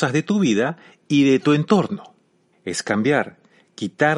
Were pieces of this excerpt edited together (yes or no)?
yes